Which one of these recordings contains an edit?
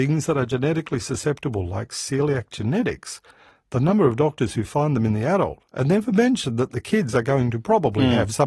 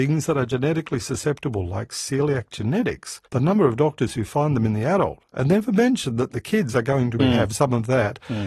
second; 2 cuts; at 3.3 s, 7.2 s

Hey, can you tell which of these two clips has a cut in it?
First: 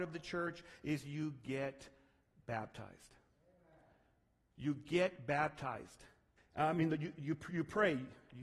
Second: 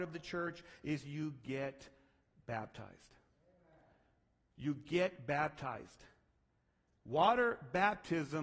first; 1 cut; at 6.4 s

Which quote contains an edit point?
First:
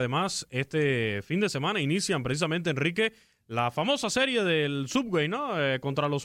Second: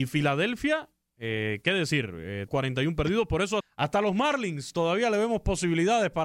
second; 2 cuts; at 2.5 s, 3.6 s

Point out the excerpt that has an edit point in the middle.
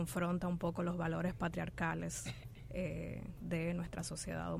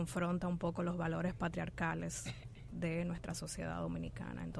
second; 1 cut; at 2.7 s

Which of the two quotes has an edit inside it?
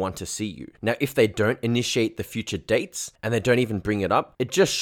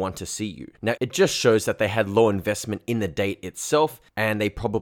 second; 1 cut; at 1.0 s

